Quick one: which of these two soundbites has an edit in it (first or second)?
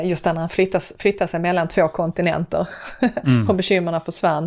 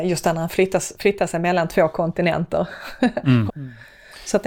second